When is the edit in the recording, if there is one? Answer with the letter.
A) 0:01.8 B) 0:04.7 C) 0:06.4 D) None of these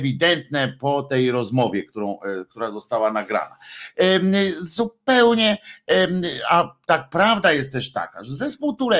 D